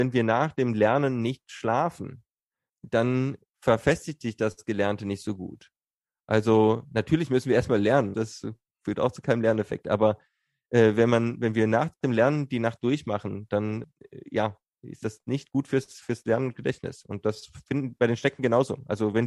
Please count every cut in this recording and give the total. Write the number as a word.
one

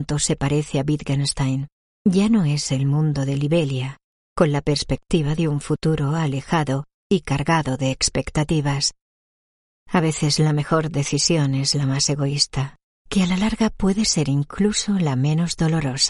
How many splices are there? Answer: one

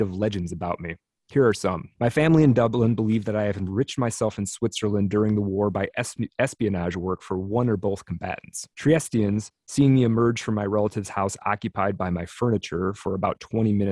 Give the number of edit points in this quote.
two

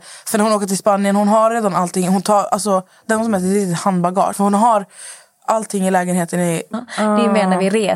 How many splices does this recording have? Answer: two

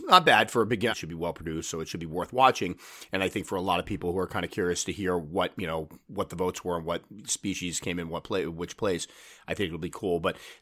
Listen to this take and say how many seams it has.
one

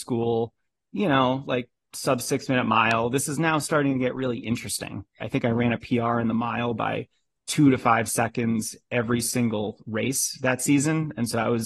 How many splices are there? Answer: one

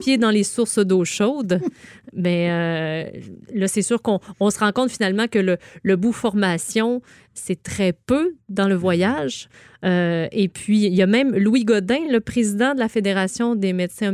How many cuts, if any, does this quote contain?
zero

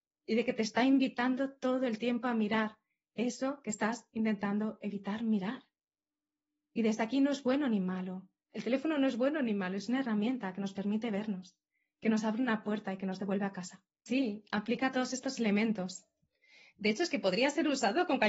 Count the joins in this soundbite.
one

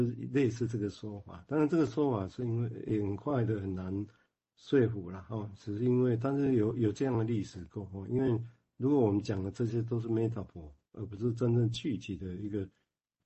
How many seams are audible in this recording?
zero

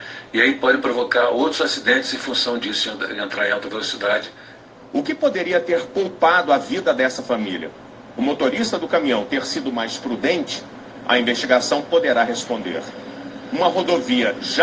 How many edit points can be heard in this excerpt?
zero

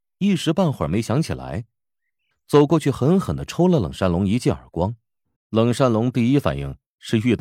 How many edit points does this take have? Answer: two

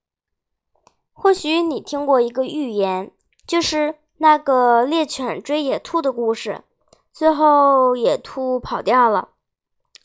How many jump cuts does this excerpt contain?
zero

